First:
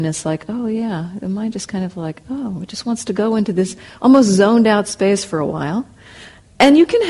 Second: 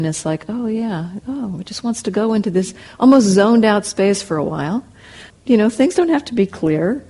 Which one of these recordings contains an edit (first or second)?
second